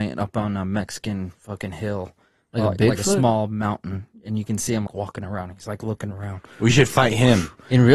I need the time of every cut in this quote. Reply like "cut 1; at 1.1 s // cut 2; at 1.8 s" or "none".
cut 1; at 4.9 s